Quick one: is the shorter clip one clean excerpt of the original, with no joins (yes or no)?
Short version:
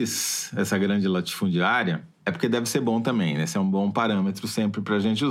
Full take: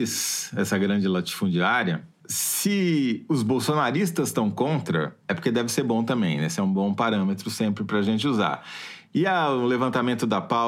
no